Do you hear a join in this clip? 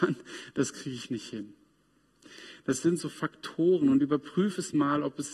no; 0 cuts

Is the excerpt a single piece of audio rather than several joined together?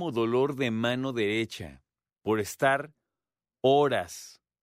no; 1 cut; at 2.1 s

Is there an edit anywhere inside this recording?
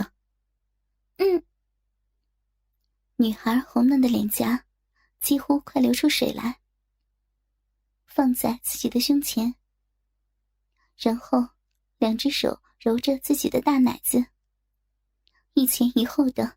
yes; 1 cut; at 8.1 s

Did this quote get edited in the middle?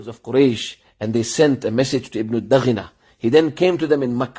no; 0 cuts

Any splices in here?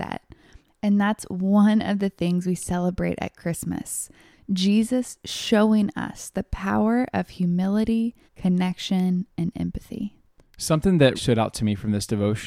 yes; 2 cuts; at 8.3 s, 11.2 s

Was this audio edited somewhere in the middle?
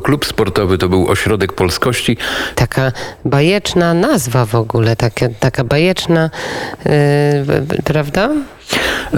yes; 1 cut; at 2.5 s

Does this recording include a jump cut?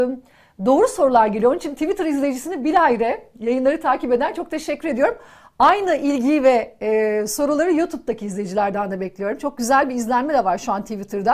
no; 0 cuts

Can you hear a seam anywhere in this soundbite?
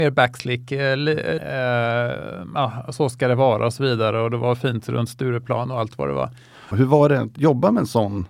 yes; 2 cuts; at 1.4 s, 6.7 s

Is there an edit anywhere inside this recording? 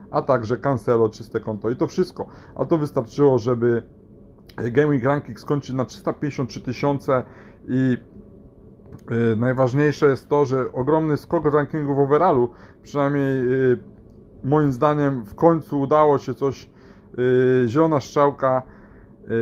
no; 0 cuts

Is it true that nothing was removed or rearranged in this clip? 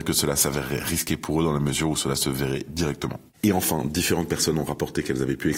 yes; 0 cuts

